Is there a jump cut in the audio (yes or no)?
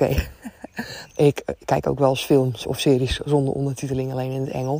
yes